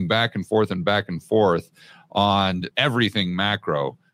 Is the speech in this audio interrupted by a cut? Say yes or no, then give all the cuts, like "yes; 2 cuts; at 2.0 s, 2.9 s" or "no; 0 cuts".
yes; 1 cut; at 2.7 s